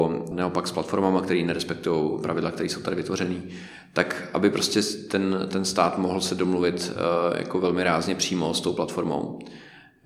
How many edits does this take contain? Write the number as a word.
one